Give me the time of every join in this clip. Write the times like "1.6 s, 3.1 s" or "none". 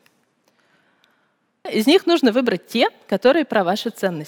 1.7 s